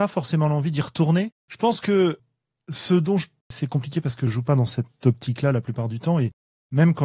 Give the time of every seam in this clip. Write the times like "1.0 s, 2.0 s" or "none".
1.4 s, 3.4 s